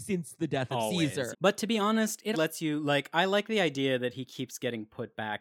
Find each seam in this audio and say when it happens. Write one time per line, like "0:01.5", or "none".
0:01.3
0:02.3